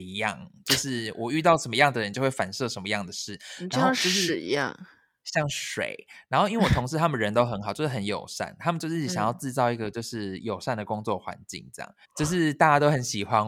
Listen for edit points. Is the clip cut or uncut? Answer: cut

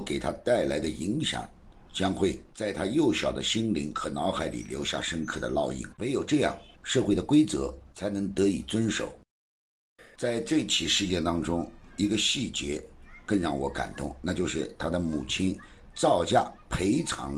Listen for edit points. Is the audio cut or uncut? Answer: cut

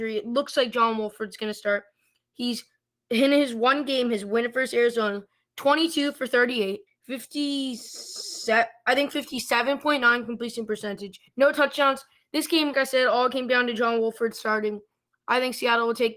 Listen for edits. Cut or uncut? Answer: cut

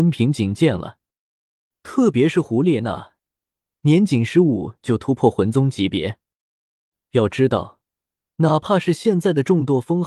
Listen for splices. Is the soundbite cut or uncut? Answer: uncut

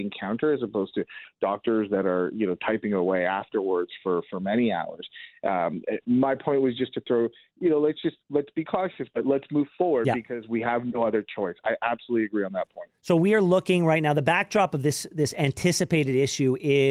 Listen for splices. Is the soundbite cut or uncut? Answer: uncut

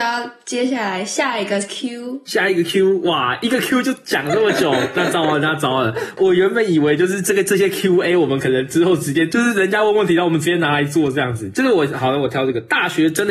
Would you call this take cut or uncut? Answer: uncut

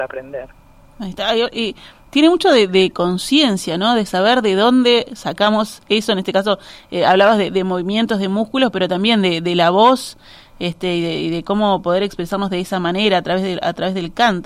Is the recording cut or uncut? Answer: uncut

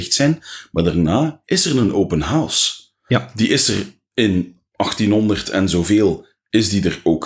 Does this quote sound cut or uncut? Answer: cut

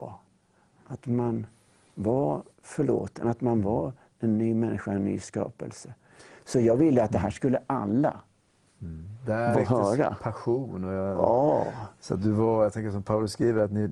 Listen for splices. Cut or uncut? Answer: cut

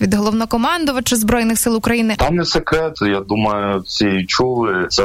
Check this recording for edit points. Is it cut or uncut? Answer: cut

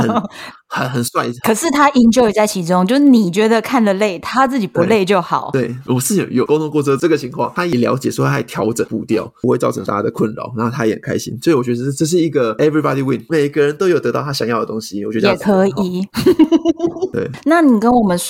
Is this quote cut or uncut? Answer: uncut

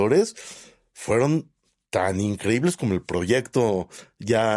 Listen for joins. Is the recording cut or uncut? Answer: uncut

